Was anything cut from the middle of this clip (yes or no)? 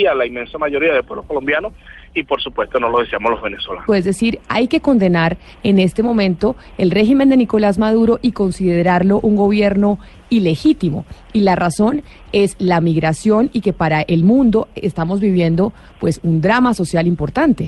yes